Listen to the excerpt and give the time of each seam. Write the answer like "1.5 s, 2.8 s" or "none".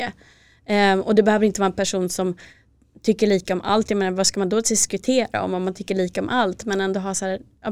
none

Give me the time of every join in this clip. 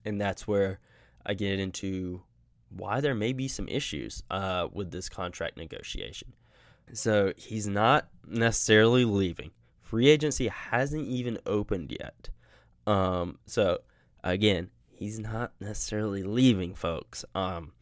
6.9 s

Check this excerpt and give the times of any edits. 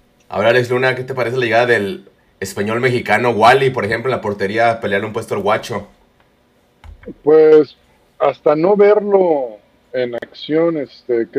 none

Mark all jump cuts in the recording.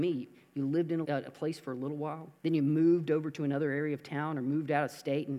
1.0 s, 2.4 s

